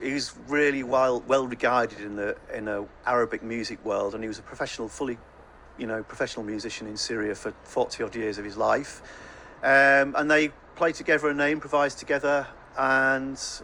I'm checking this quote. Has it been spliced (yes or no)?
no